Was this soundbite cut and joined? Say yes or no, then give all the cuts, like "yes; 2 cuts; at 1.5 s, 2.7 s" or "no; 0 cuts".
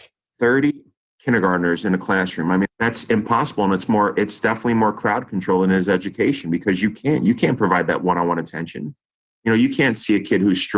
yes; 1 cut; at 2.6 s